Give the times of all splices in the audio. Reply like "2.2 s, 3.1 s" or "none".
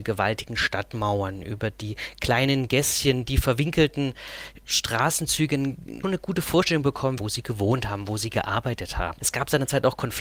6.0 s, 7.2 s, 9.2 s